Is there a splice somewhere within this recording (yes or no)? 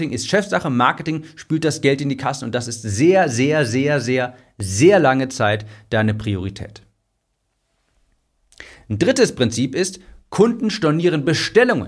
no